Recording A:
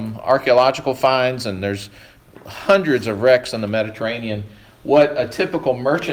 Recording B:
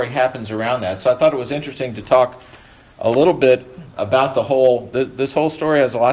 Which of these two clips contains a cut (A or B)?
B